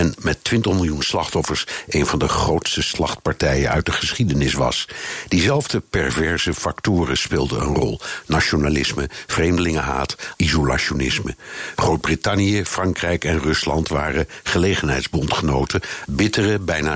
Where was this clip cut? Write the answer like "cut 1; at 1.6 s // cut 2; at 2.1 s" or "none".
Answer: cut 1; at 10.3 s // cut 2; at 16.1 s

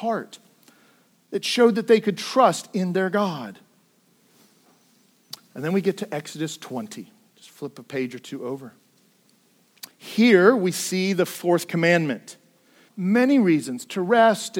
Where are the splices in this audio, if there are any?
cut 1; at 9.9 s // cut 2; at 12.9 s

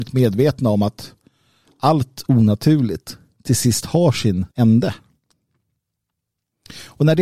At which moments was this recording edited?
cut 1; at 4.5 s

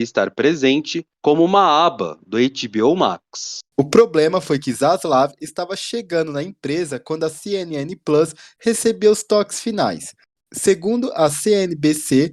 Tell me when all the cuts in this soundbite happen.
none

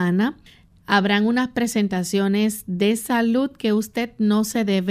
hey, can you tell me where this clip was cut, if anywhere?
none

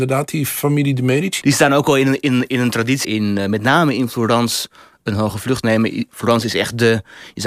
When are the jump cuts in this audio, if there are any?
cut 1; at 1.4 s // cut 2; at 3.0 s

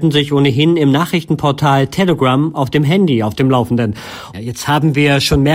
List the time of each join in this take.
cut 1; at 4.3 s

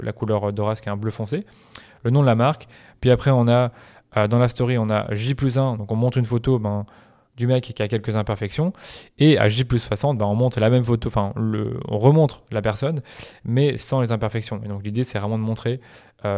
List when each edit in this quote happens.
none

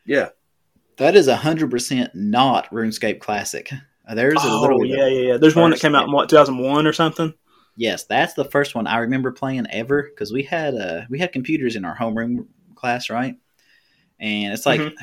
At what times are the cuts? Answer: none

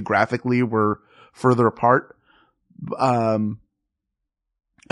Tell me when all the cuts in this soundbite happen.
none

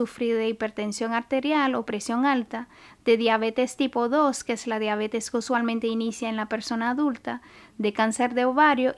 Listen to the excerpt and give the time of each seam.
none

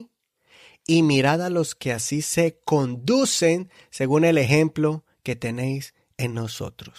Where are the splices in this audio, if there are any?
none

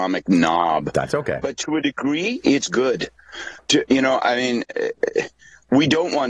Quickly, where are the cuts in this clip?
none

